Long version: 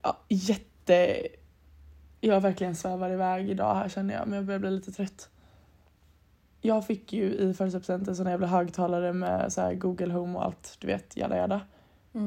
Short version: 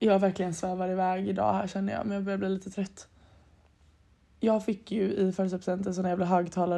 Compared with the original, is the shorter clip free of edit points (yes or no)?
yes